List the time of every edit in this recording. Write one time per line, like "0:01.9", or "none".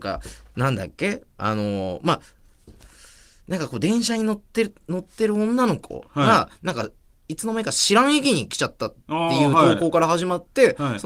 none